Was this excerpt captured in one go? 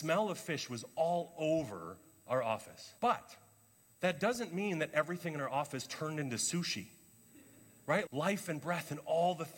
no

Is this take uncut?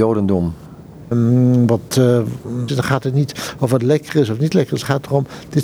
no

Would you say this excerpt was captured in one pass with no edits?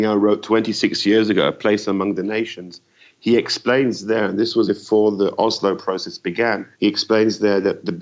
no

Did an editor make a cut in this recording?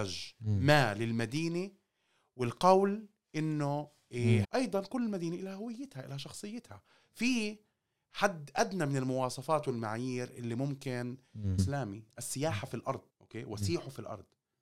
yes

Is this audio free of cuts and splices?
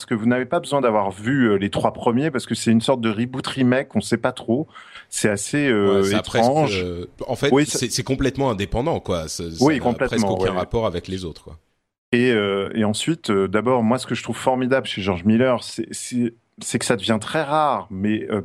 yes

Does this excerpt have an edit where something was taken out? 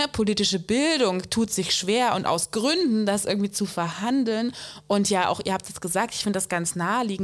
no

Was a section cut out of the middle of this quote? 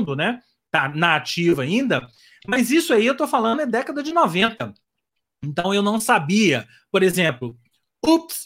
no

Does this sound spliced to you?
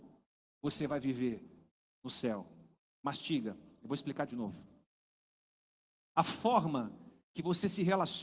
no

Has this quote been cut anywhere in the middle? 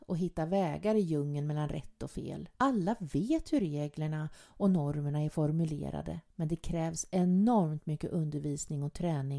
yes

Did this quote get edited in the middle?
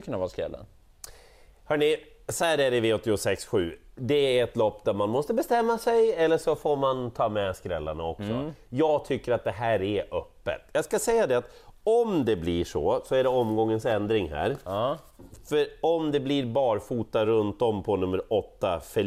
no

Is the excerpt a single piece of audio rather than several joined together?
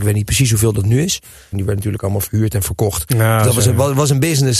no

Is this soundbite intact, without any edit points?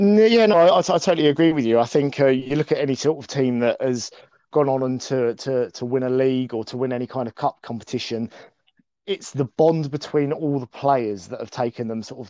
yes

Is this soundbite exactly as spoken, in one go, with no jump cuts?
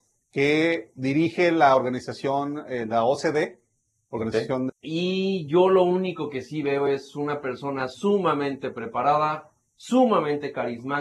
no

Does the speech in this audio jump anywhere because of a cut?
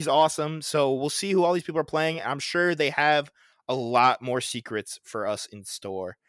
no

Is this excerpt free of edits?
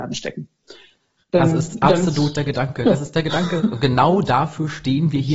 yes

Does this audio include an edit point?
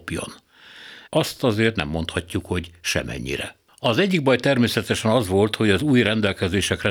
yes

